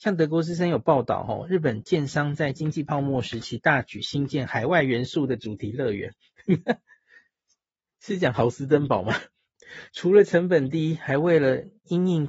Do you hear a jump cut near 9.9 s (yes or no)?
no